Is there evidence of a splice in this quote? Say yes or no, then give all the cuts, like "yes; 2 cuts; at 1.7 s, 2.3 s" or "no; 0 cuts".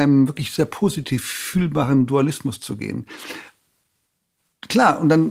no; 0 cuts